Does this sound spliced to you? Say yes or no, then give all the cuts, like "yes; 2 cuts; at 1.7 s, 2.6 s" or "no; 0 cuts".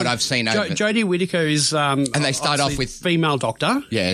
yes; 1 cut; at 3.0 s